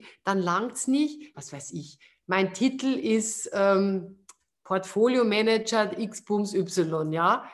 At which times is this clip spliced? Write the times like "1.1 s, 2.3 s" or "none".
1.3 s